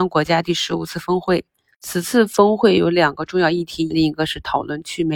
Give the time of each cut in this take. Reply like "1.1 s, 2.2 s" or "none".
3.9 s